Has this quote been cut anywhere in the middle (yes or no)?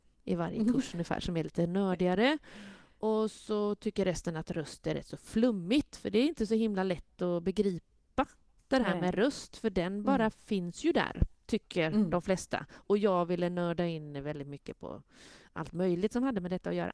no